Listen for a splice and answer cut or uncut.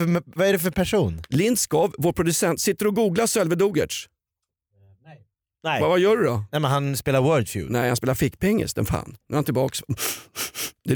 uncut